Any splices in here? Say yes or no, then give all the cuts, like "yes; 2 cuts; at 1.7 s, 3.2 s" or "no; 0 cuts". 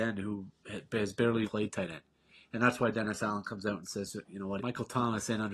yes; 2 cuts; at 1.5 s, 4.6 s